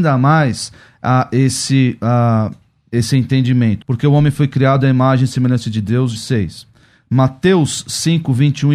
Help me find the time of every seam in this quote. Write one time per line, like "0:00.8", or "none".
0:03.8
0:06.2